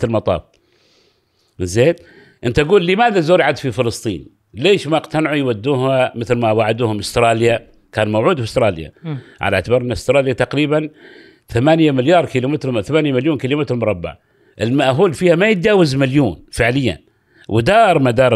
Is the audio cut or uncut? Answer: uncut